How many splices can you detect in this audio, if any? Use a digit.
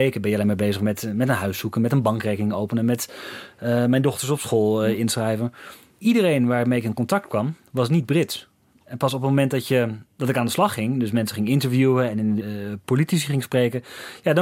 1